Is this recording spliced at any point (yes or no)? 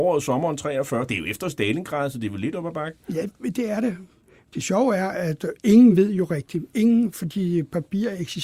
no